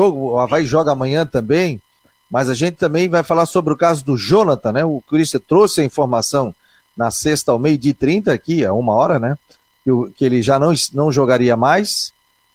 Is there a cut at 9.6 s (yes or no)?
no